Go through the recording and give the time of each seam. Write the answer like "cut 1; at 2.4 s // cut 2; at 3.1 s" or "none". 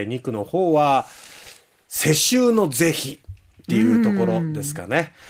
none